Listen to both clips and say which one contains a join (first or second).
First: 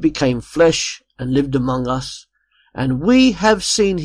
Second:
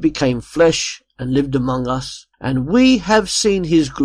second